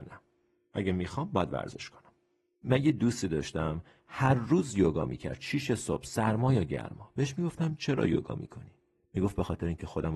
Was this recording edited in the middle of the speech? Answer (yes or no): no